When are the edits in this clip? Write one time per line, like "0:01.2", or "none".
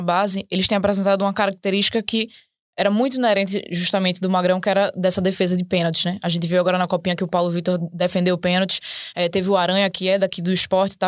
none

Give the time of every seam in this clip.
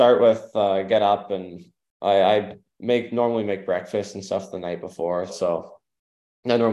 0:05.3

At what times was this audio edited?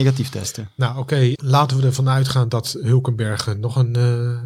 0:01.4

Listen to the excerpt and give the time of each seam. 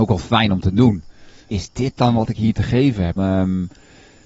0:01.5
0:03.2

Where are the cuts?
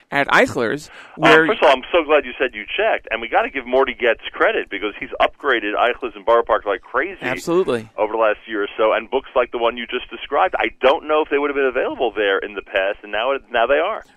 none

